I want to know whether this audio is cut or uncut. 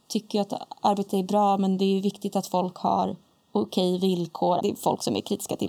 cut